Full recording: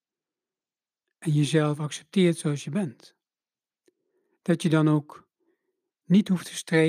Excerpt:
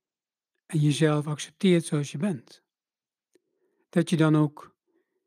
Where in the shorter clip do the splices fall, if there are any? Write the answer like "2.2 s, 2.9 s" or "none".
none